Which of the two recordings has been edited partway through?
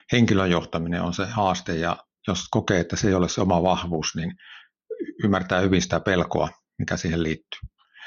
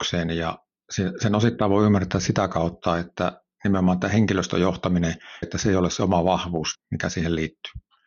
second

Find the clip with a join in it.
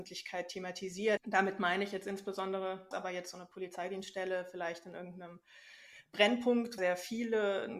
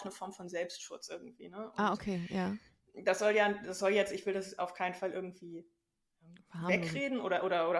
first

